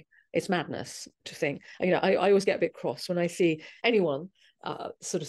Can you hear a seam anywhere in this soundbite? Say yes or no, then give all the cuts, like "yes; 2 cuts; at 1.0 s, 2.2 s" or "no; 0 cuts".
no; 0 cuts